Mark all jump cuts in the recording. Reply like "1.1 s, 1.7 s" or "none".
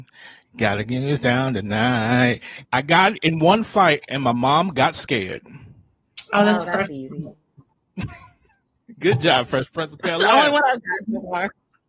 2.6 s